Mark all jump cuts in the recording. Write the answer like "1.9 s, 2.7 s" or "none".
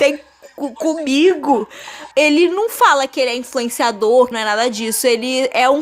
2.1 s, 4.3 s